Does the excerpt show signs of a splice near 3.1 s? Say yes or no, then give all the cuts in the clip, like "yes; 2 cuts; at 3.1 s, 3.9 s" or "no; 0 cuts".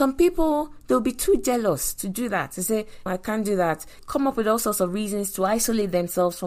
yes; 1 cut; at 3.1 s